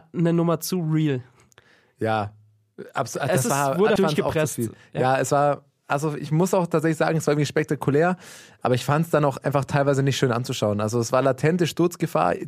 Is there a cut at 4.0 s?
yes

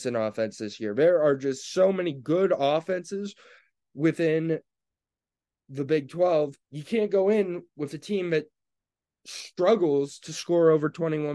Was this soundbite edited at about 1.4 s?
no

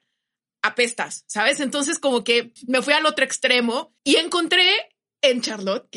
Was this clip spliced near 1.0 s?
no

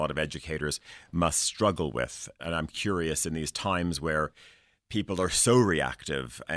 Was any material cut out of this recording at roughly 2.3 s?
no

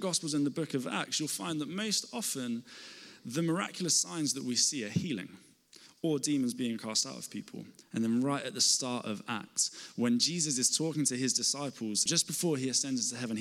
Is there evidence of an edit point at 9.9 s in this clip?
no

